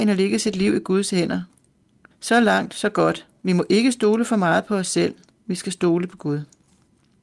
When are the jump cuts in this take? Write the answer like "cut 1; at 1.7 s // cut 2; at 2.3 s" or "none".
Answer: cut 1; at 2.1 s